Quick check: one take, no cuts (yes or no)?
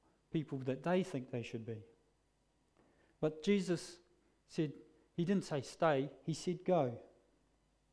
yes